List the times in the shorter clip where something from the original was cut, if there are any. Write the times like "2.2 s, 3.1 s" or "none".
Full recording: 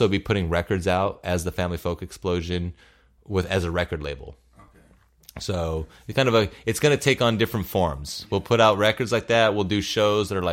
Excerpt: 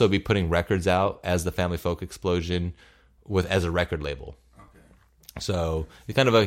none